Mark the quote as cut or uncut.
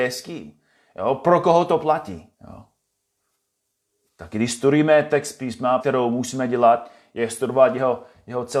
cut